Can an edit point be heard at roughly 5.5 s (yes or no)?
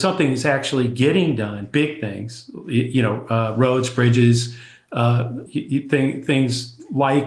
yes